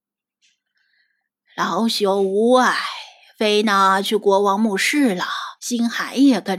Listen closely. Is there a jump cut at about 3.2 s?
no; 1 cut; at 5.6 s

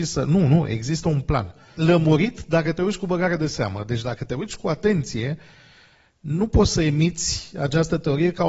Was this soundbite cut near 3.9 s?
no; 1 cut; at 1.8 s

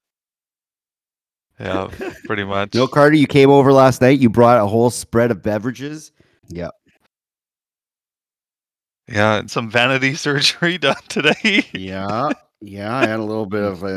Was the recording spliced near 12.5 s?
no; 2 cuts; at 6.4 s, 9.5 s

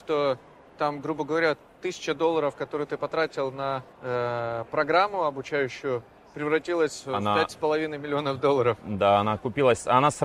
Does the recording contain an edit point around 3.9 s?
yes; 1 cut; at 3.9 s

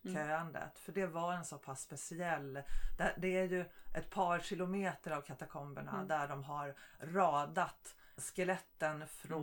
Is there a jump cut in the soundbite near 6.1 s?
no; 1 cut; at 8.2 s

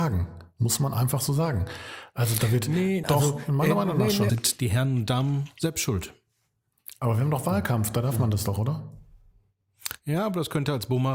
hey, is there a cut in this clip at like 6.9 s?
no; 2 cuts; at 3.0 s, 4.3 s

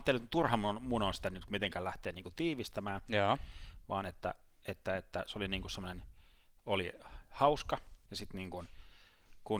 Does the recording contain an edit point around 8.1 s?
yes; 1 cut; at 8.1 s

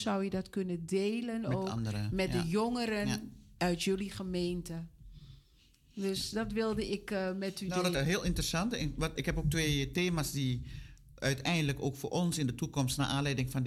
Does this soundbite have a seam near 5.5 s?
no; 2 cuts; at 7.9 s, 9.2 s

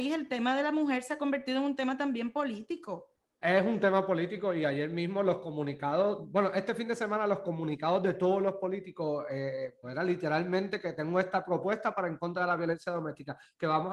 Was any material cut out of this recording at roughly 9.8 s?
yes; 2 cuts; at 3.4 s, 9.8 s

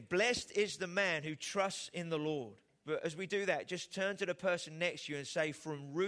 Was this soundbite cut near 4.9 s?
no; 1 cut; at 2.8 s

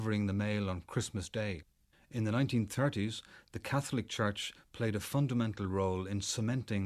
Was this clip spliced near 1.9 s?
yes; 1 cut; at 1.9 s

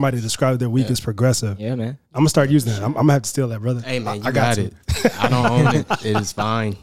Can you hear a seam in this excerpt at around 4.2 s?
no; 1 cut; at 2.1 s

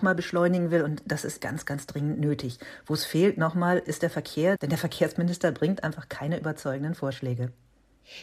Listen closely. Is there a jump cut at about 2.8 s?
no; 1 cut; at 1.4 s

